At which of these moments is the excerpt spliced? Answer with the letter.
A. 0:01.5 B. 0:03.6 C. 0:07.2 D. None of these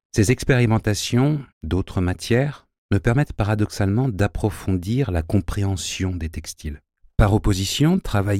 A